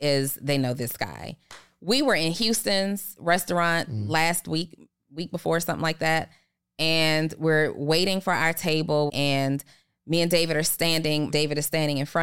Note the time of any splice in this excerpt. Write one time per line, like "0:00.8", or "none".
0:09.1
0:11.3